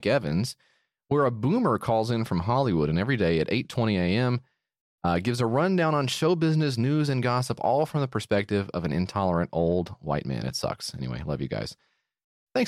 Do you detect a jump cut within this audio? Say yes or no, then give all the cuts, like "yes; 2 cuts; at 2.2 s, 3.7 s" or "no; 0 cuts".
no; 0 cuts